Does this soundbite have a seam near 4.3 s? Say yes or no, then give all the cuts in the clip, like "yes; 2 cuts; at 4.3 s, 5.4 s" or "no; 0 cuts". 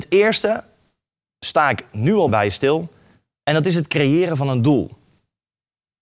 no; 1 cut; at 2.3 s